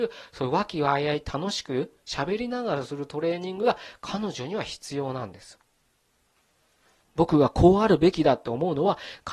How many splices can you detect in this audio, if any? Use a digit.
1